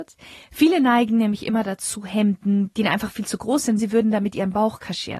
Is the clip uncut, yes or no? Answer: no